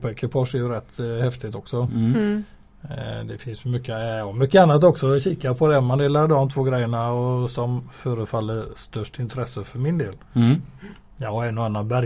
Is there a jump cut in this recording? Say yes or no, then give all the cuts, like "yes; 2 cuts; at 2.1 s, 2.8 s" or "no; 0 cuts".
no; 0 cuts